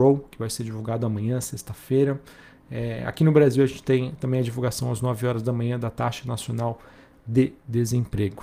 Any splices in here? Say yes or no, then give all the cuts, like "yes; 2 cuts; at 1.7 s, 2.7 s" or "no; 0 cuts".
no; 0 cuts